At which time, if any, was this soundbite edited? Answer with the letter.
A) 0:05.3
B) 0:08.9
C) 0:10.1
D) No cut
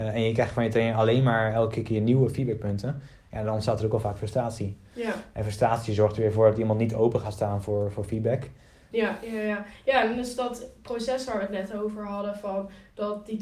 B